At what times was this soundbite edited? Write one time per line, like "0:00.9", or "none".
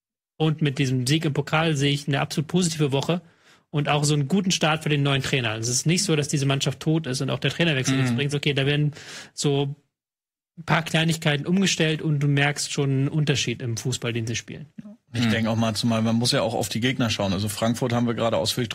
0:08.3

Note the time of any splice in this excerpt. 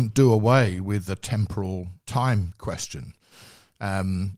0:02.0

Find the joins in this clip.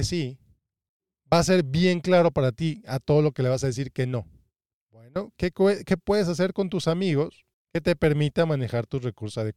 0:04.7

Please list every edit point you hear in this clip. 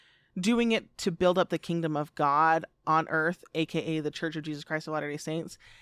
none

